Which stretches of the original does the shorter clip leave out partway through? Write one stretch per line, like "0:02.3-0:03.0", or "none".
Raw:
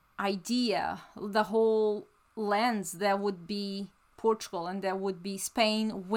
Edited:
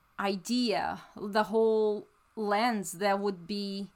none